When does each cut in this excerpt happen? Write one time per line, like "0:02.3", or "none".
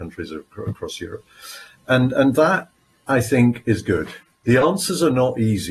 0:04.4

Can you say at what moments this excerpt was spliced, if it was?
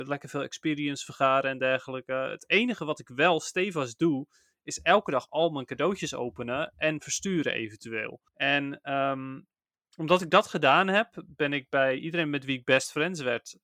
0:08.3

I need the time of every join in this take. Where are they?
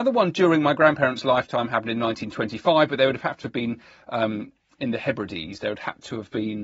none

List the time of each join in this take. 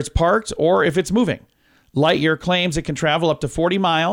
none

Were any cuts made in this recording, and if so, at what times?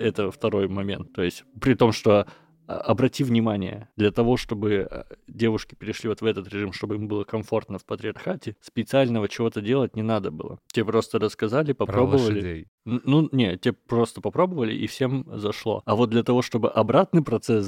none

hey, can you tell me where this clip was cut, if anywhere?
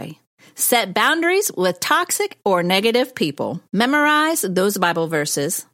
0:03.7

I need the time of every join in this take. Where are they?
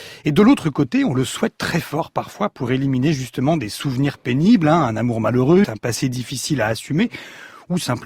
0:05.6

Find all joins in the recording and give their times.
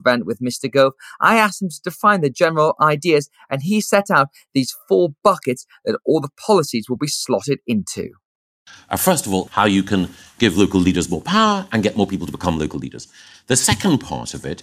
0:09.5

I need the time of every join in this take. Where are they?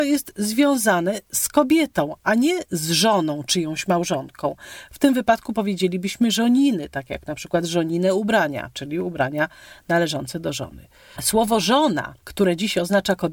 0:11.2

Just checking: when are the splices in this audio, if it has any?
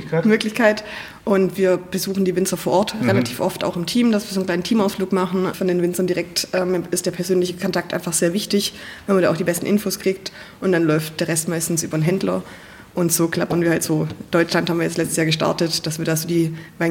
0:05.5

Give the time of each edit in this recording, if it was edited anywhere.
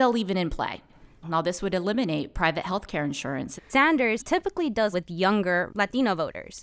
0:01.2
0:03.6
0:04.9

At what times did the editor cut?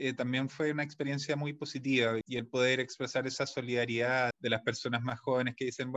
0:02.2
0:04.3

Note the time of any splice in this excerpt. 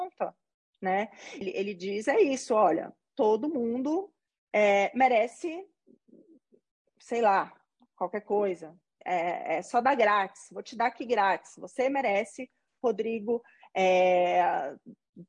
0:01.4

